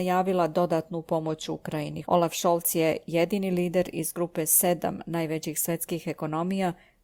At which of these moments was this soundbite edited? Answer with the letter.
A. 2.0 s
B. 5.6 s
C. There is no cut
A